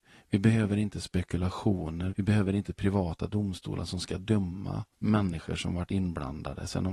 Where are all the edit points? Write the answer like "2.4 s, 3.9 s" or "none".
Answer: 2.1 s, 4.9 s